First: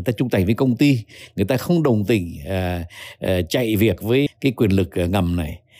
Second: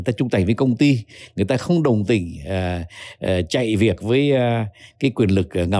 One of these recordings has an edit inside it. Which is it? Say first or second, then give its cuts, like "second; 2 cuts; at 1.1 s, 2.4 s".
first; 1 cut; at 4.3 s